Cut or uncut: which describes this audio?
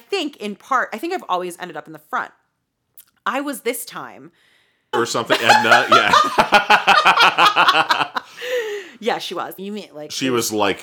cut